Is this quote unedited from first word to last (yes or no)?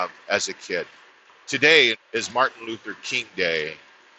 no